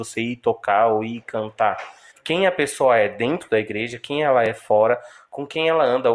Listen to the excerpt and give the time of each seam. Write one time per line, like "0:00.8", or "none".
0:02.1